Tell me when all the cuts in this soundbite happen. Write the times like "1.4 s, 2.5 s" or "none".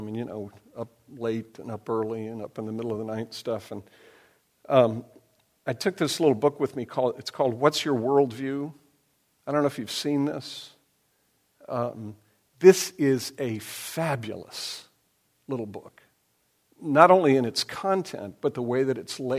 none